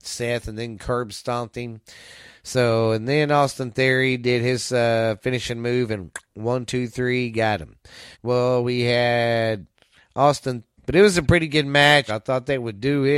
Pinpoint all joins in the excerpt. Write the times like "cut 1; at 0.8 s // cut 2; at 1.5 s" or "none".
cut 1; at 8.1 s // cut 2; at 10.8 s // cut 3; at 12.1 s